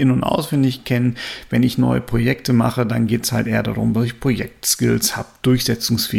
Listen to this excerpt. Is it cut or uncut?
uncut